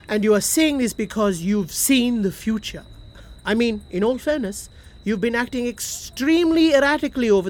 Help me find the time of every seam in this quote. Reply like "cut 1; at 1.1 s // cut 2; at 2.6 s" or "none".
cut 1; at 3.4 s